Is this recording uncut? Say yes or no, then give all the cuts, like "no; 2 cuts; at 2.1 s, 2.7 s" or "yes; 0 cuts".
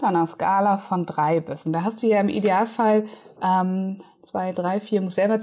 no; 1 cut; at 1.6 s